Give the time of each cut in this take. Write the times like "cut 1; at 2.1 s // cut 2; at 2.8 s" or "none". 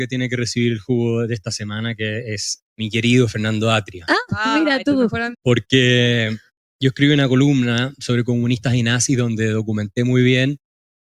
cut 1; at 2.6 s // cut 2; at 5.3 s